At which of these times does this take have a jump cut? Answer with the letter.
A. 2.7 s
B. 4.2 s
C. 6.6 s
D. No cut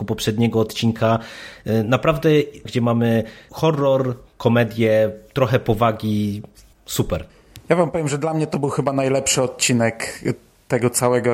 A